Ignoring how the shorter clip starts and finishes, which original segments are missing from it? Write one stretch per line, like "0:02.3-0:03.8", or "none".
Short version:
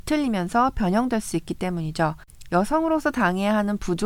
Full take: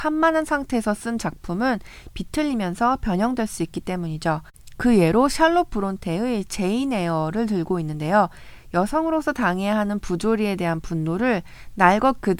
0:04.8-0:08.7

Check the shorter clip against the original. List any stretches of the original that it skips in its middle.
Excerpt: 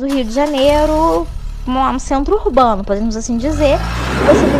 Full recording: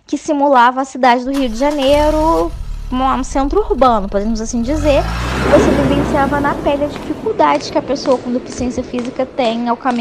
none

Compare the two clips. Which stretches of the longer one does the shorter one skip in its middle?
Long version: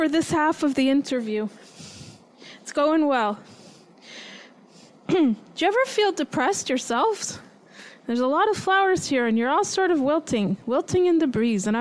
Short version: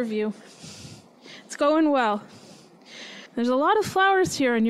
0:04.4-0:08.0

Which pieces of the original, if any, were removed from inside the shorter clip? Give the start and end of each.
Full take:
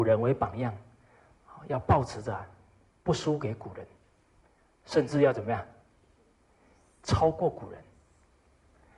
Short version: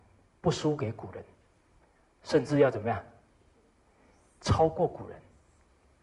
none

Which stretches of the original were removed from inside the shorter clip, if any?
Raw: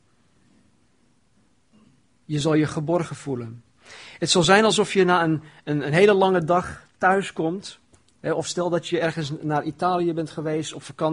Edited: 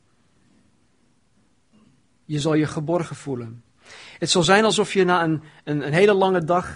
none

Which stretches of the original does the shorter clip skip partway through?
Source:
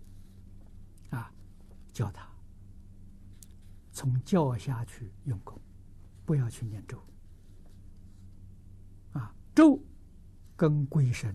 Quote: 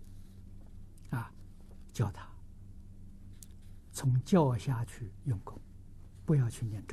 none

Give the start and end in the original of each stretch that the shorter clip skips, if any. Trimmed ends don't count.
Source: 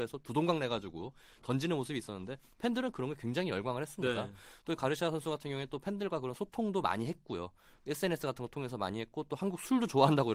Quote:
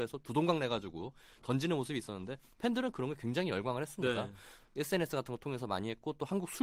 0:04.6-0:07.7

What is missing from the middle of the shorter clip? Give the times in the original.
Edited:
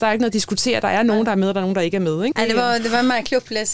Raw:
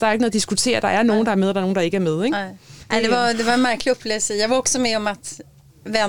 0:02.3-0:02.9

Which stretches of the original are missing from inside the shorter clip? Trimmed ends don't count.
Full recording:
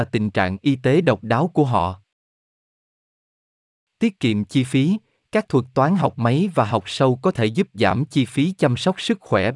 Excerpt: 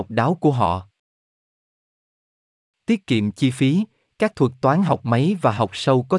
none

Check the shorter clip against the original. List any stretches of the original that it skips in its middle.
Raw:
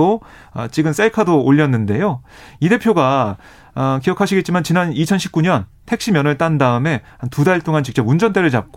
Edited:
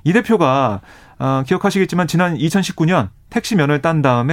none

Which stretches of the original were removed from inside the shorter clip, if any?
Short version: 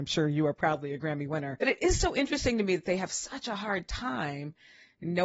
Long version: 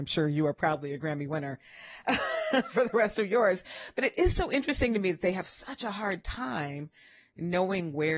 0:01.6-0:03.9

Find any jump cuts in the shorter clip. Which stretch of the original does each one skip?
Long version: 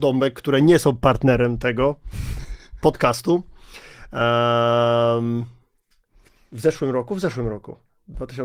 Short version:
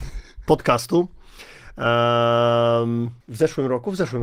0:05.6-0:06.4

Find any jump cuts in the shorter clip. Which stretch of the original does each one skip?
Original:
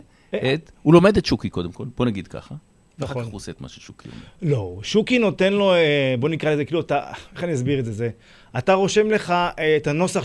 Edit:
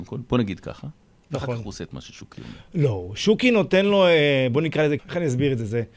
0:06.7-0:07.3

